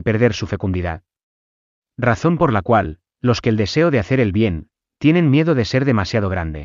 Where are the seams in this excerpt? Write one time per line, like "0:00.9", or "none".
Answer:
none